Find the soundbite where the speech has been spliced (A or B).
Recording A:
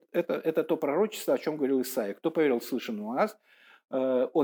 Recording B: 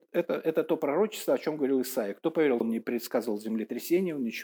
B